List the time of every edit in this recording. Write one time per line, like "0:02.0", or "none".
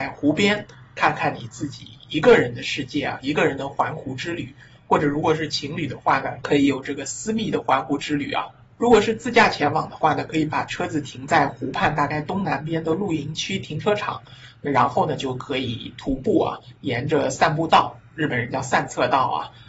none